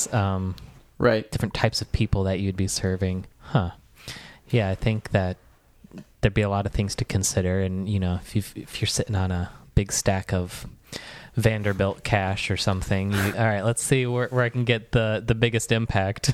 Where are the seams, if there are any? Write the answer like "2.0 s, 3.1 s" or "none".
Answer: 3.3 s, 13.3 s